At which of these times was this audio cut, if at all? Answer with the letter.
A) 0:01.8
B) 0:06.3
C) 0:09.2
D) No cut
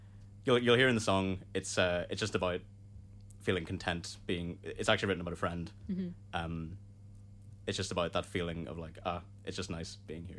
D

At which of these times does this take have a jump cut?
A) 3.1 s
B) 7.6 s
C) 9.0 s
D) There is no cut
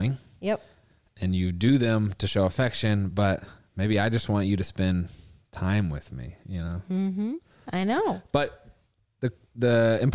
B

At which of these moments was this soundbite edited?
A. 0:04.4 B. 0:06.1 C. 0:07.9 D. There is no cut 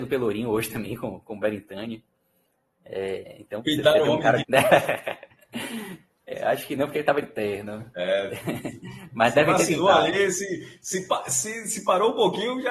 A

